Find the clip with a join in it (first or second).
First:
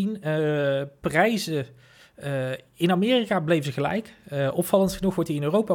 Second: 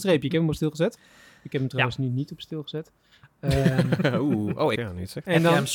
second